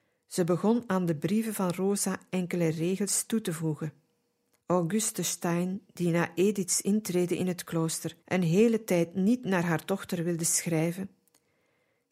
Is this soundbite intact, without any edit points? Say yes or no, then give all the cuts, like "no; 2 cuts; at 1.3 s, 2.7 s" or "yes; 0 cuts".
no; 2 cuts; at 4.6 s, 8.2 s